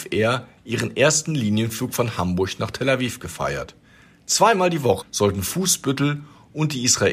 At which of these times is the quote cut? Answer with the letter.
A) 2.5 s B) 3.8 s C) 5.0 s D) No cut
C